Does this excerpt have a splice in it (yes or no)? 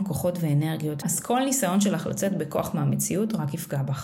yes